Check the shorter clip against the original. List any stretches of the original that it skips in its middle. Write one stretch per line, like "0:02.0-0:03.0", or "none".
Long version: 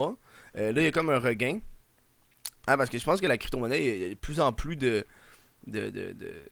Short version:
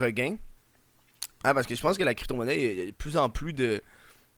none